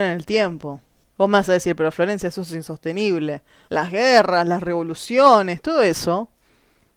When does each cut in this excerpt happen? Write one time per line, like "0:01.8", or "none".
0:03.7